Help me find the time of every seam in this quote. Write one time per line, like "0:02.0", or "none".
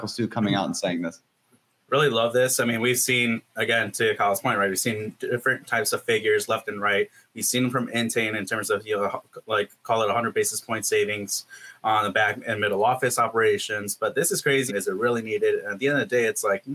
0:14.7